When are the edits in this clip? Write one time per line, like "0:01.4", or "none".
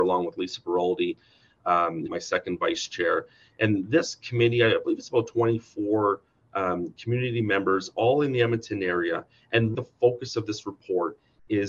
0:02.1
0:09.7